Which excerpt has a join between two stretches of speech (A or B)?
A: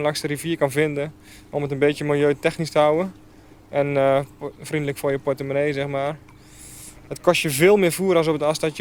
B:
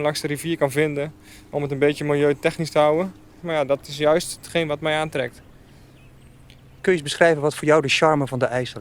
B